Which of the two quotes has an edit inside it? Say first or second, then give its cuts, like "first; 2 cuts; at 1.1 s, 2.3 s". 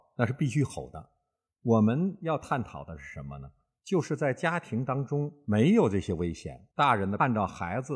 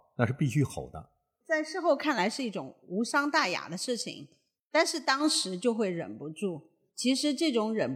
second; 1 cut; at 1.4 s